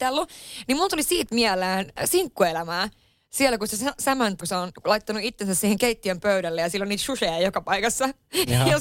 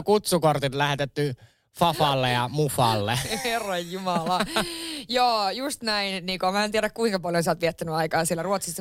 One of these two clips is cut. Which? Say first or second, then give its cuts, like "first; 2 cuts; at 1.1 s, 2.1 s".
first; 1 cut; at 4.4 s